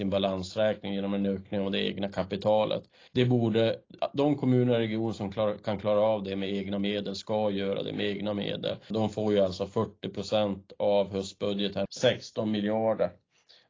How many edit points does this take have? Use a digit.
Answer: 3